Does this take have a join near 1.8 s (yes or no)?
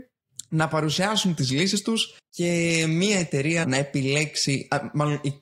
no